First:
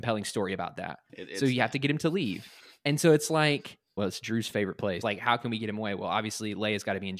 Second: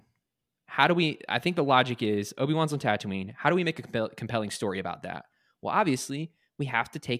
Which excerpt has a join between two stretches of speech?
first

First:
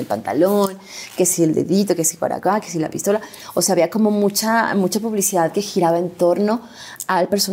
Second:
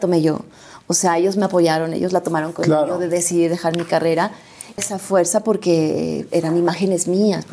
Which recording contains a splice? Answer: second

